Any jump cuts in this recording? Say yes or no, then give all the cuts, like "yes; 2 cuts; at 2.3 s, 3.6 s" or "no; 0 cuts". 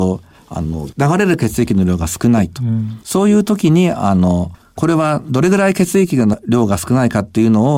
no; 0 cuts